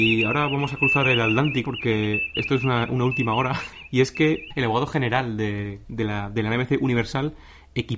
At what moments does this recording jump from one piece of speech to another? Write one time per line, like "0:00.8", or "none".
0:01.6